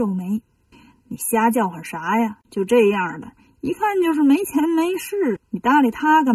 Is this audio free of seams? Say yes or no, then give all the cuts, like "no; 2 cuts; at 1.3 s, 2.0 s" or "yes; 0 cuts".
yes; 0 cuts